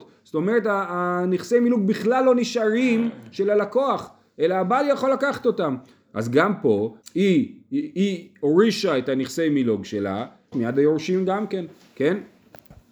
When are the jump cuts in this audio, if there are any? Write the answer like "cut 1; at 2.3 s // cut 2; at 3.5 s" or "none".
cut 1; at 7.0 s // cut 2; at 10.5 s